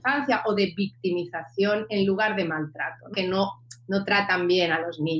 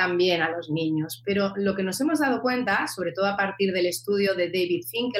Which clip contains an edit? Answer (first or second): first